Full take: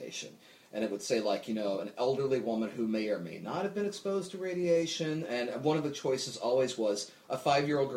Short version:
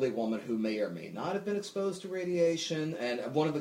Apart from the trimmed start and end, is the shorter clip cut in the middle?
no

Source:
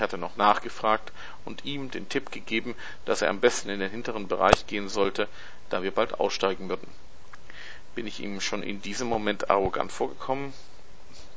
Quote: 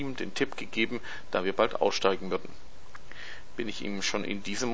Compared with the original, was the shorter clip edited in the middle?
yes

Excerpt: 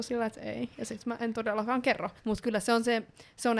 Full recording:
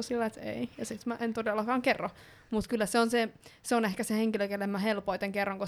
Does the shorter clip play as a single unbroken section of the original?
no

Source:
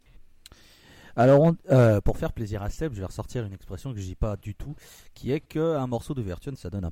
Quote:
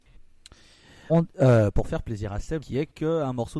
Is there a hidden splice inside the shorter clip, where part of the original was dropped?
yes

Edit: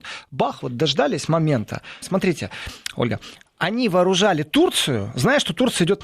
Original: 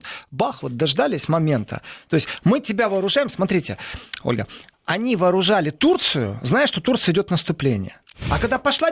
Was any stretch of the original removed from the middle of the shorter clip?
yes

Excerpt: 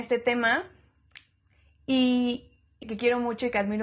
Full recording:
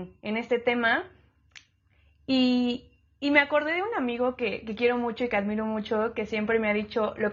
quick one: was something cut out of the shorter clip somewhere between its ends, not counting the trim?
yes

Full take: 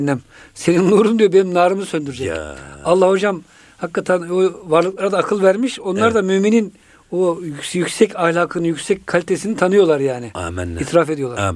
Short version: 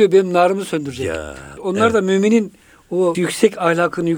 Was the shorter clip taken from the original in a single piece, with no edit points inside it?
no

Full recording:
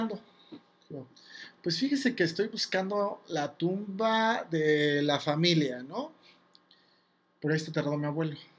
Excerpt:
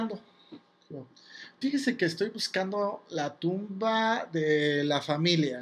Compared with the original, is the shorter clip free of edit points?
no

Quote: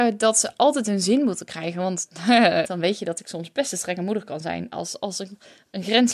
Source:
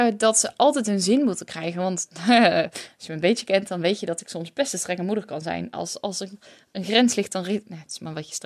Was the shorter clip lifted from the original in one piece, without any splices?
no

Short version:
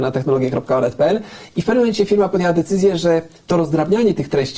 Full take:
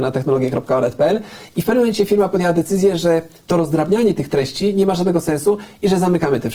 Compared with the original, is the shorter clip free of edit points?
yes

